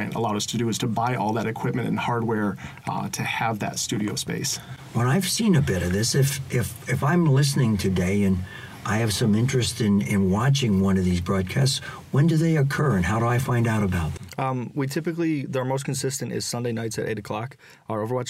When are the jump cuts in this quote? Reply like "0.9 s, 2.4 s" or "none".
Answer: none